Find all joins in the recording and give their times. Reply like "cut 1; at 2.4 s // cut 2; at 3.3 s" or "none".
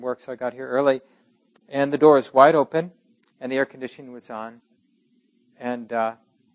cut 1; at 3.3 s